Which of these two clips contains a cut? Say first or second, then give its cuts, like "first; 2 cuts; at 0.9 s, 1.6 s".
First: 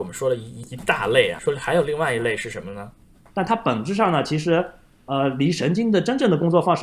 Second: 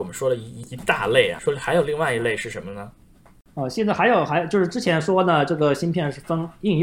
first; 1 cut; at 3.3 s